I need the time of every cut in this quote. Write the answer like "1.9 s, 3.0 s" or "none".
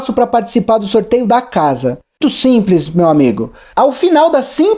2.2 s

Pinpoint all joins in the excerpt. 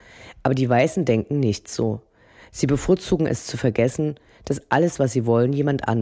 none

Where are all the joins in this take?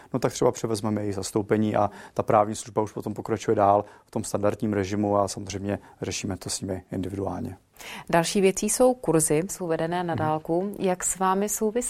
9.5 s

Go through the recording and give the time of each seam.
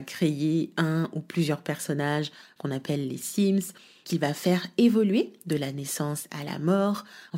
none

